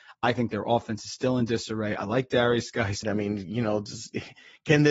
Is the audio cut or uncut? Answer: cut